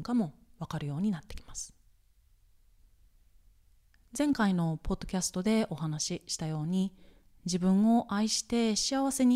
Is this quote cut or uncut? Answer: uncut